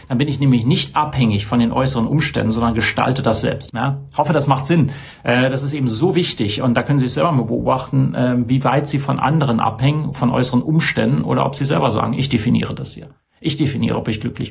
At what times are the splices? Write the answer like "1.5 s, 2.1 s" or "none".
3.7 s